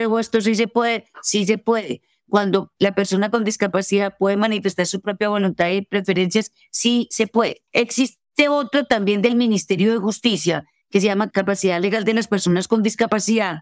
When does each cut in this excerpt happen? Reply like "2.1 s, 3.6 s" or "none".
7.7 s